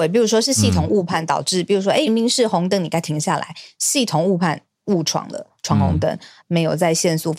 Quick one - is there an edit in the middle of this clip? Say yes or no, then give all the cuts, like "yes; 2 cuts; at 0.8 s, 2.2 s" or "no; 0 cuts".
yes; 2 cuts; at 2.1 s, 6.4 s